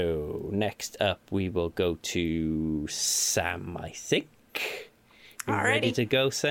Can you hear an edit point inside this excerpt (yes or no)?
no